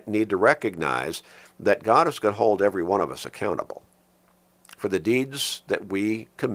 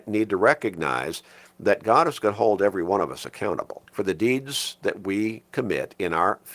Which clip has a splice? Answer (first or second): second